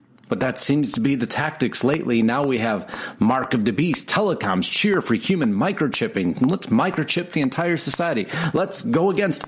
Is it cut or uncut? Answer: uncut